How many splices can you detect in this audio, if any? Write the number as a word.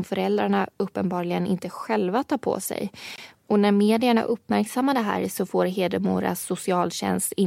one